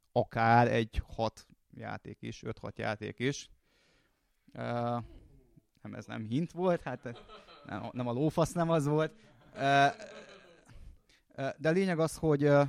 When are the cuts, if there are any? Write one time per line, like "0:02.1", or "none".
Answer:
none